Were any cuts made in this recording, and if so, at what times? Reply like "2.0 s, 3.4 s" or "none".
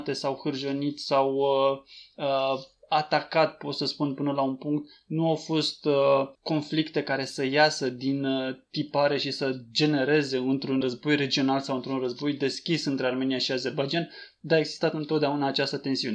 6.3 s, 10.8 s